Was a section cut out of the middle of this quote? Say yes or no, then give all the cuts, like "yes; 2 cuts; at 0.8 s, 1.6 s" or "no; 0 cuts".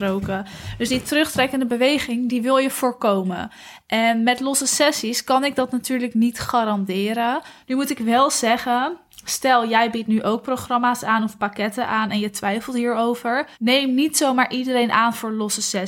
yes; 2 cuts; at 7.6 s, 13.5 s